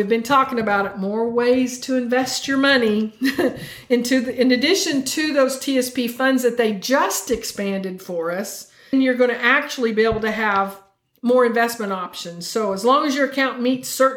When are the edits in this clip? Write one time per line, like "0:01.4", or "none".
0:08.9